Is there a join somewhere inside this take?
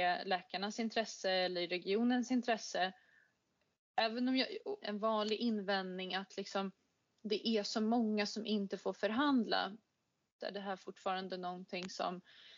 yes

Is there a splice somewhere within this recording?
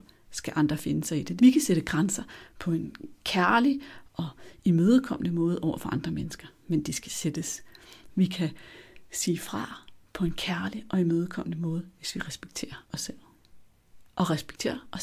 yes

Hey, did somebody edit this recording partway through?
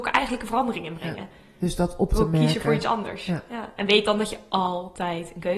no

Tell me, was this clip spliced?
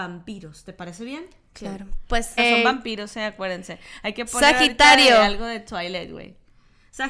yes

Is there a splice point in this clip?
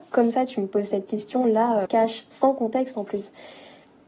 yes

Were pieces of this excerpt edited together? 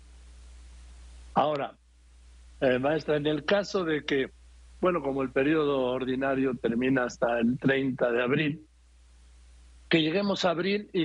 no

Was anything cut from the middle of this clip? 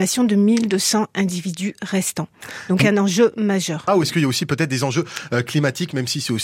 yes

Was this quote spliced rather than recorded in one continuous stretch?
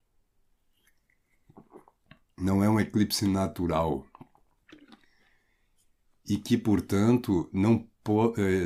no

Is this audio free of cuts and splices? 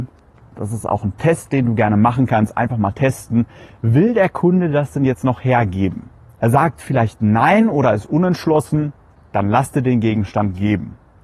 yes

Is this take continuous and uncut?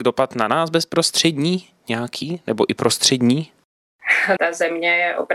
no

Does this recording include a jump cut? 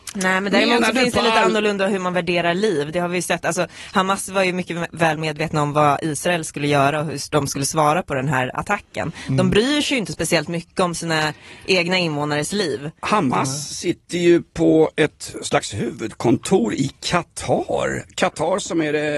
no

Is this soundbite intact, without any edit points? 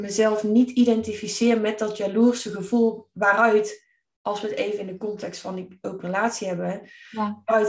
yes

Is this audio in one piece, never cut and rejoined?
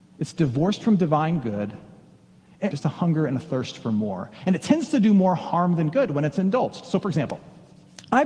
no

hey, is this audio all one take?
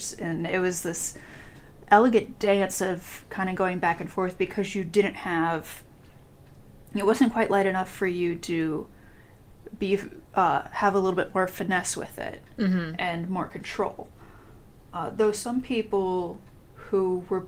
yes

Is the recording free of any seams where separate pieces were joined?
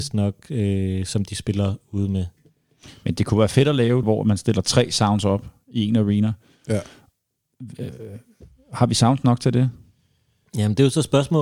no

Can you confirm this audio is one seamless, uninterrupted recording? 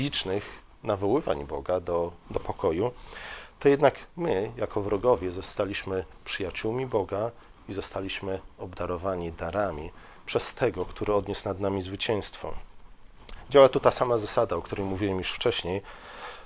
yes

